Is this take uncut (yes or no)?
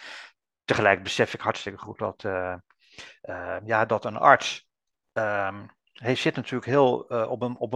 yes